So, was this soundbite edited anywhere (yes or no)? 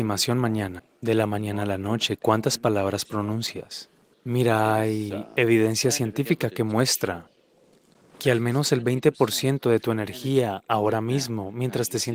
yes